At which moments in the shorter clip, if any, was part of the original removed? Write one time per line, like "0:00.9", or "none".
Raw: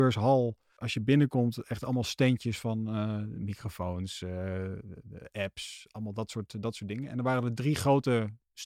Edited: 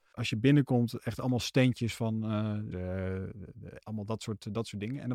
0:02.7
0:03.8

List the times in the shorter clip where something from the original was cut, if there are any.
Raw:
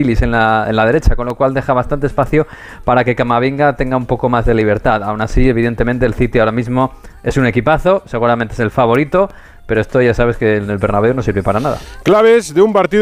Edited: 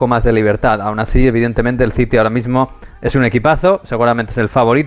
none

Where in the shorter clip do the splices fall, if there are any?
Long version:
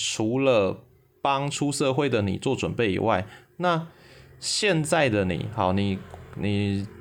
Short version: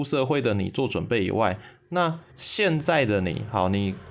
0:02.3

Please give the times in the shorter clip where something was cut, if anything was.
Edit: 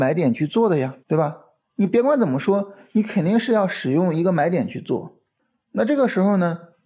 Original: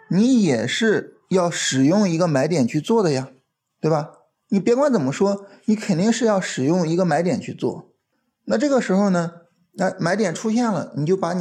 0:01.0

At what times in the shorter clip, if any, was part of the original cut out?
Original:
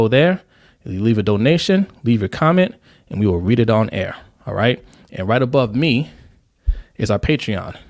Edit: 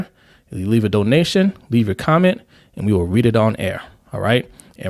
none

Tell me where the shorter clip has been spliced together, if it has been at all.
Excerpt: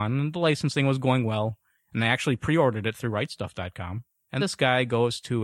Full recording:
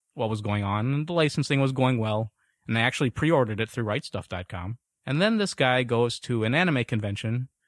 0:04.4

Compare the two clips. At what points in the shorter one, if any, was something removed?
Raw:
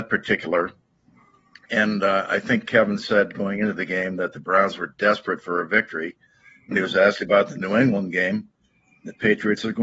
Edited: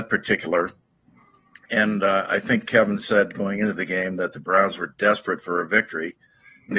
none

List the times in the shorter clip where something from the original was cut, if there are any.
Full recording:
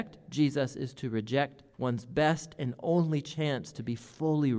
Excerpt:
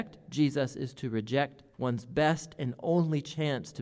none

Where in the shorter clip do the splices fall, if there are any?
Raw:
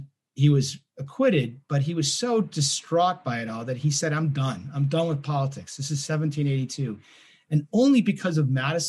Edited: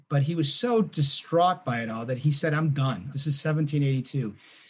0:03.1

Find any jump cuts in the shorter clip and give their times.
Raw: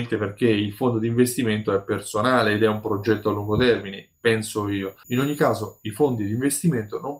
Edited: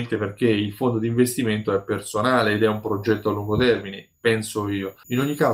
none

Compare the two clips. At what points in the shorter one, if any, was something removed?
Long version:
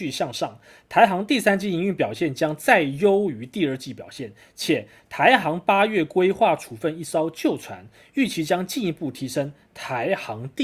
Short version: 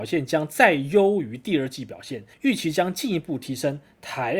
0:02.3

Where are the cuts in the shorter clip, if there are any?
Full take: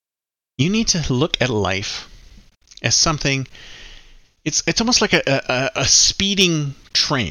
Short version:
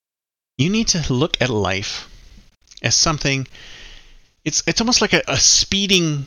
0:05.2

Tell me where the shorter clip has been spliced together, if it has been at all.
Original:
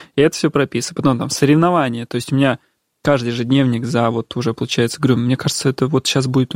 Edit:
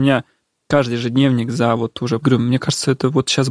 0:02.2

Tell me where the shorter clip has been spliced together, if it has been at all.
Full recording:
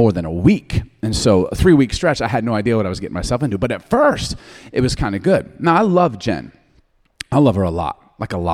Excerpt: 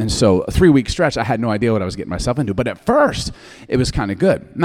none

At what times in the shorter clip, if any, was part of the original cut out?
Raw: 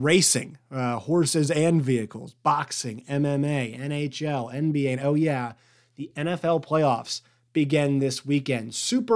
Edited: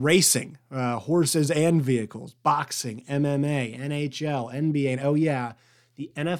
none

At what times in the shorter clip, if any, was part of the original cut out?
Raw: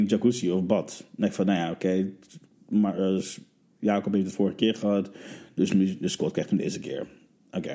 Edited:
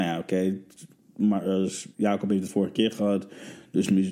0:01.9

